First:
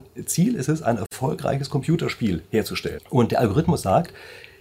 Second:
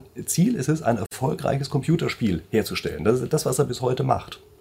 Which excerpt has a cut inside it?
first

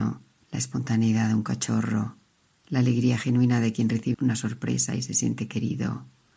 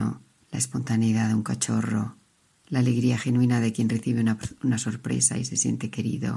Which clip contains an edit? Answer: first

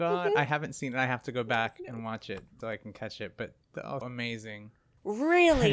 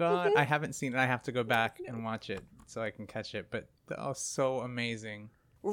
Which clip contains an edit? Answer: first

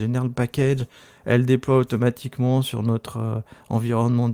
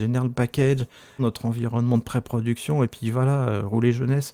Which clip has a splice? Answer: second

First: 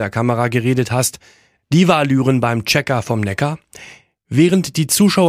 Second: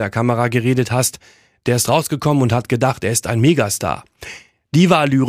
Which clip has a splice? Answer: first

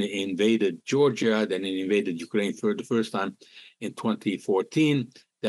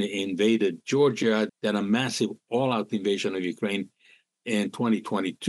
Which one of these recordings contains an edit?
second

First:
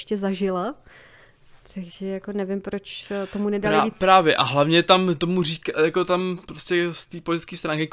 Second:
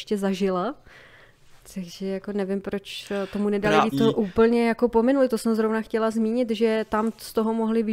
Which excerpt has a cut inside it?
second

